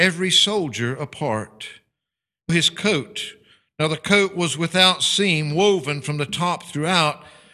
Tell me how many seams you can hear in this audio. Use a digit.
1